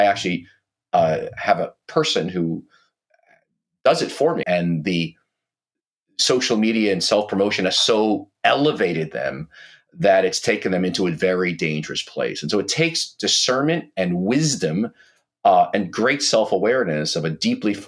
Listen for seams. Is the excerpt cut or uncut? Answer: cut